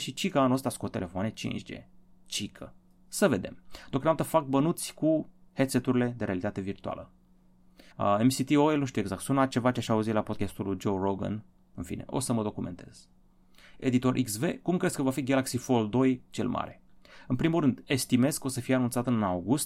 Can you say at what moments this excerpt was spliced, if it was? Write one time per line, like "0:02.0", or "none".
0:07.9